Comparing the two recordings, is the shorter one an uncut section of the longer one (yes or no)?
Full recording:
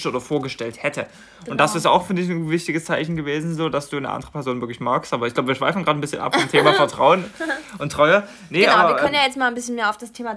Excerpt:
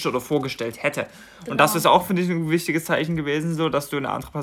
yes